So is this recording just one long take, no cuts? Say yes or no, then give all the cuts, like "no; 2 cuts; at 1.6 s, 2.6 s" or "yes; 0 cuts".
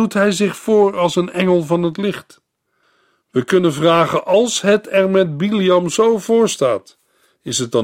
yes; 0 cuts